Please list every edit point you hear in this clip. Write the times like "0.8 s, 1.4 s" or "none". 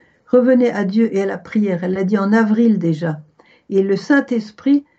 none